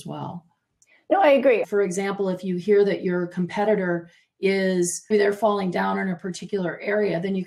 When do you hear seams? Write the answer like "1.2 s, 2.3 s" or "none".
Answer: 1.6 s, 5.1 s